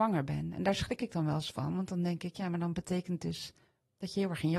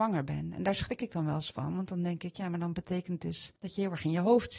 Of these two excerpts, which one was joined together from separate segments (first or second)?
second